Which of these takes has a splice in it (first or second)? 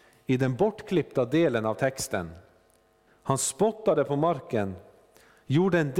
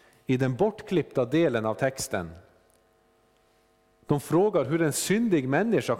first